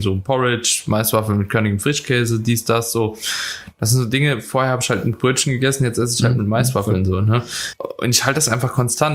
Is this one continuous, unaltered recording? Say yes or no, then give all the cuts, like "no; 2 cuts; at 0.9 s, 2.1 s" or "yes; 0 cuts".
yes; 0 cuts